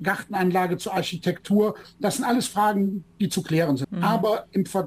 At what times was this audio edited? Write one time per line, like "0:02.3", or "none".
0:03.8